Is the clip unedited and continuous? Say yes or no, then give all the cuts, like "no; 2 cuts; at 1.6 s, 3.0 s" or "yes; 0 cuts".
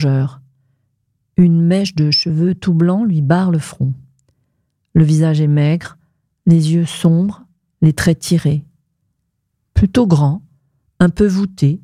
yes; 0 cuts